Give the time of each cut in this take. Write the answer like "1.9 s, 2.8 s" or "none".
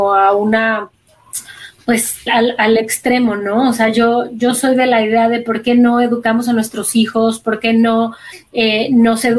2.3 s

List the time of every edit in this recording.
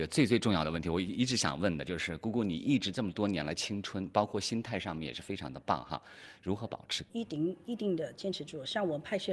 7.1 s

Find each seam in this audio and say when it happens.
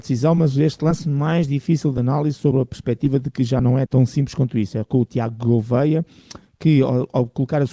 3.9 s

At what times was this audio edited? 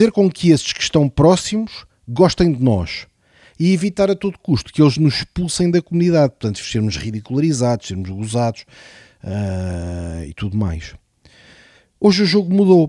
6.6 s

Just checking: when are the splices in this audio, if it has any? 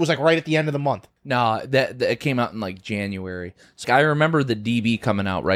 1.2 s, 3.8 s

